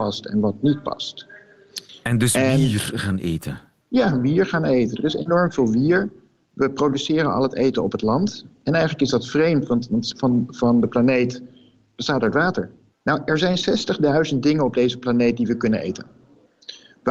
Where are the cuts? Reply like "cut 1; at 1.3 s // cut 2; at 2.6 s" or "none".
cut 1; at 10.1 s // cut 2; at 12.9 s